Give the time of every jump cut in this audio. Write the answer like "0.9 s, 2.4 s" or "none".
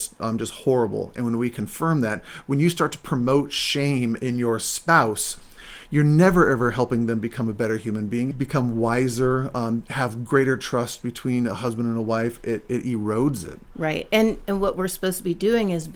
8.3 s